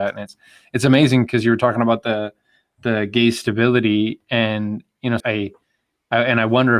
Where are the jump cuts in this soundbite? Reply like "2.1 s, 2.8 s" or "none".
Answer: 5.2 s